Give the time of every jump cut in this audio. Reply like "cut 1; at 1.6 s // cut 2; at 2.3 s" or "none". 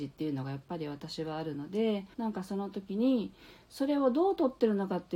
cut 1; at 2.1 s